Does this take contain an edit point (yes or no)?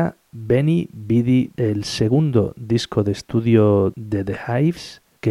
yes